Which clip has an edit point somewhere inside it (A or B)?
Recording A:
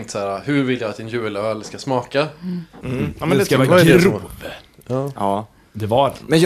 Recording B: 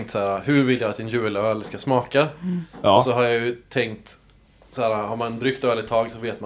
A